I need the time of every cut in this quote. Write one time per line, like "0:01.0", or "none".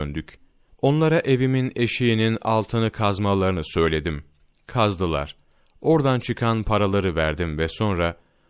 none

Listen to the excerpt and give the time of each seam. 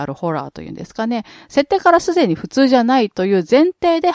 none

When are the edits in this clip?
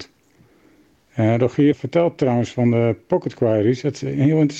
0:01.7

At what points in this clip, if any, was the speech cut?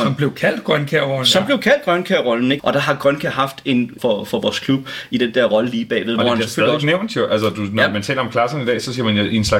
0:02.6
0:04.0

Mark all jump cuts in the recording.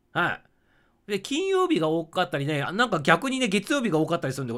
0:02.6

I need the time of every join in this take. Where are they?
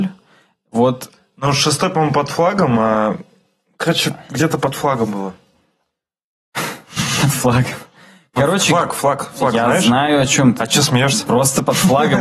none

